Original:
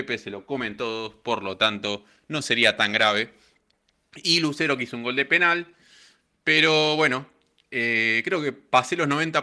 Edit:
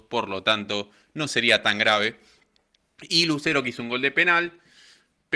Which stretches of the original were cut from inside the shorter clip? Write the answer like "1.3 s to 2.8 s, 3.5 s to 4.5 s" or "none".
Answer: none